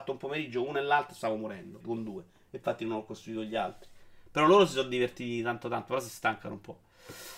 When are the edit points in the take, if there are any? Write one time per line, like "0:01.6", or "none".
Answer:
0:01.8